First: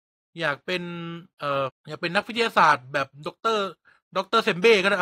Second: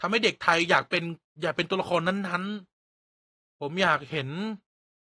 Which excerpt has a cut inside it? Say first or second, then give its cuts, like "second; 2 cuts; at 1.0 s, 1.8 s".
first; 1 cut; at 1.7 s